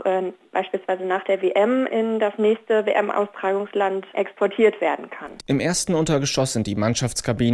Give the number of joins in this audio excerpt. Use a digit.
2